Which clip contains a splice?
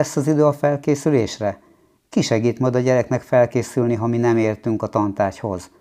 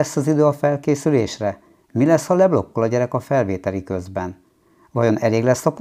second; 1 cut; at 1.8 s

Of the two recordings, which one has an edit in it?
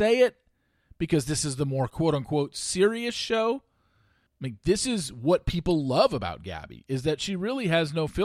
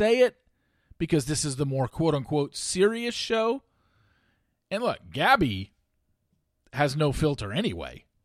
first; 1 cut; at 4.3 s

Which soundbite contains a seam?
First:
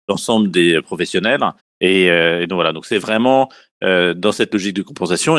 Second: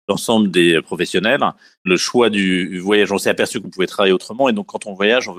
first; 1 cut; at 1.6 s

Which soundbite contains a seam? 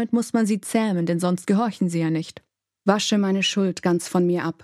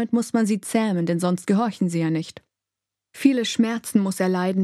first; 1 cut; at 2.8 s

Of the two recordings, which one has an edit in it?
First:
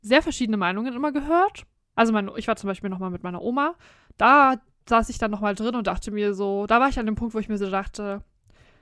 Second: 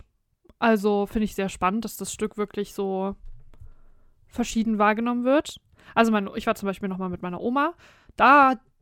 first; 1 cut; at 2.0 s

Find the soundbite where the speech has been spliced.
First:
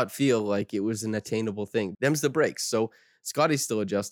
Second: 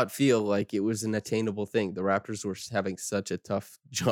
first; 1 cut; at 1.9 s

